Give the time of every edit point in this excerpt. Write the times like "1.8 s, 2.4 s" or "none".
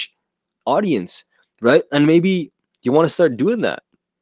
none